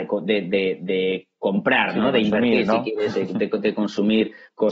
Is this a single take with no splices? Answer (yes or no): yes